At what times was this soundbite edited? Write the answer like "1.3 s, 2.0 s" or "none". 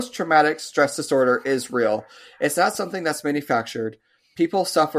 none